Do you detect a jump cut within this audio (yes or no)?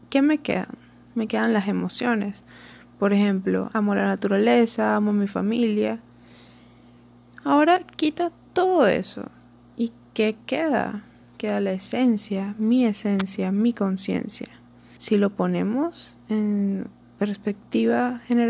yes